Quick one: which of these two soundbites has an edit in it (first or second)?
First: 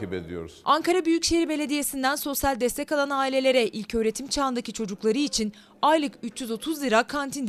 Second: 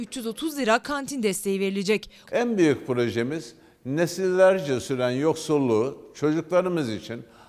second